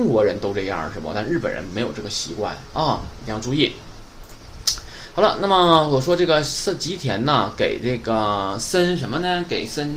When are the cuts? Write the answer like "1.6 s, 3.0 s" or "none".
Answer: none